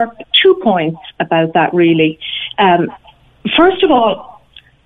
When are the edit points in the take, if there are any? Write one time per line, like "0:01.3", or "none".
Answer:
none